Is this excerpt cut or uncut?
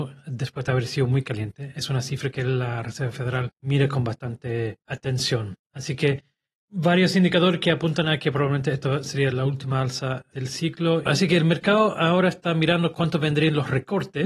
uncut